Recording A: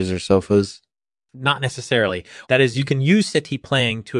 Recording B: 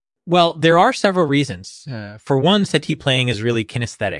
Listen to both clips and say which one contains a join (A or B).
A